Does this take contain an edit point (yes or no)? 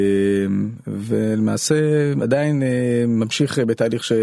no